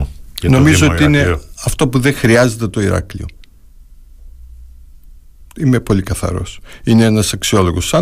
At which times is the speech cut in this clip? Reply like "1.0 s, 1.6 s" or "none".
none